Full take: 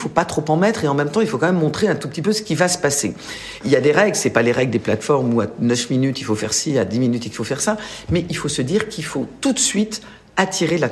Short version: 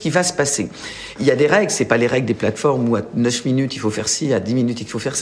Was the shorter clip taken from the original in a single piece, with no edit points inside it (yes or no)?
yes